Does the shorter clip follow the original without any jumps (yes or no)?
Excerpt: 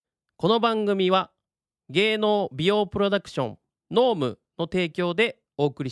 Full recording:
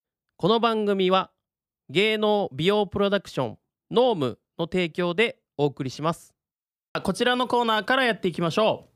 yes